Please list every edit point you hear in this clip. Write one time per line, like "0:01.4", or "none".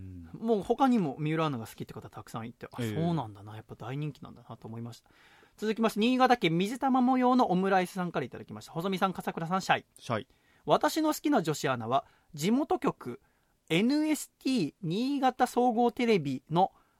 none